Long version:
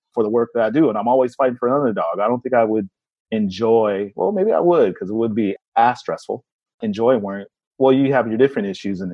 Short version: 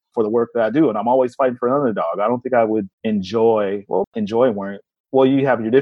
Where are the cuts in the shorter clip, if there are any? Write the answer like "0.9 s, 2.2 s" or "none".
2.9 s, 4.0 s